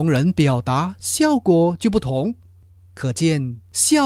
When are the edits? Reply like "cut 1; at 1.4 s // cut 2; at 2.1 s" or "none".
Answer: none